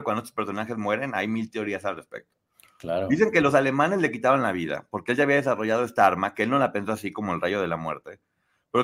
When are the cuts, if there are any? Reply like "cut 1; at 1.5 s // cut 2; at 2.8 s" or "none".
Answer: none